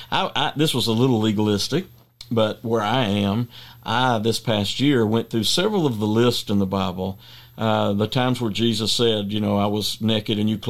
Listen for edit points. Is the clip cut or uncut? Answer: uncut